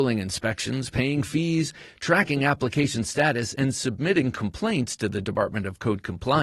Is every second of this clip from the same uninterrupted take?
yes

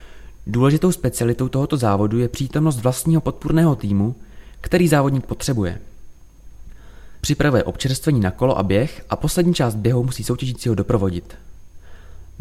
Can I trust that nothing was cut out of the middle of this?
no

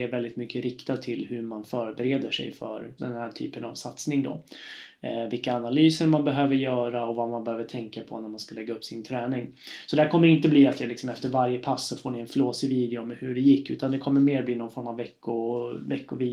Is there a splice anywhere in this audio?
yes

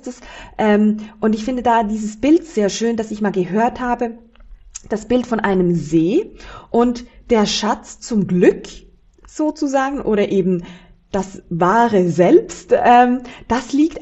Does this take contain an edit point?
no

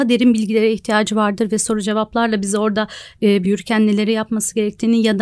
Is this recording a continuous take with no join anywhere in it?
no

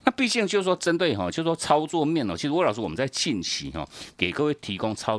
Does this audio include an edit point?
no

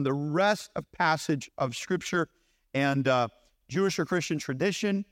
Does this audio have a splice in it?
no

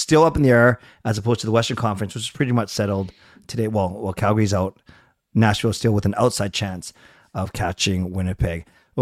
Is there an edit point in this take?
no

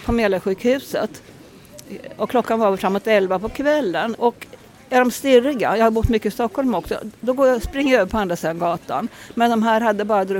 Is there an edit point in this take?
yes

